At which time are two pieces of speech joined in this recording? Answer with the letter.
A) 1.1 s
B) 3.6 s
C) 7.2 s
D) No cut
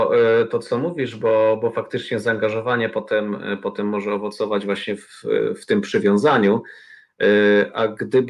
D